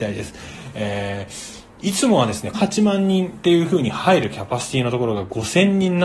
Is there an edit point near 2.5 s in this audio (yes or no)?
yes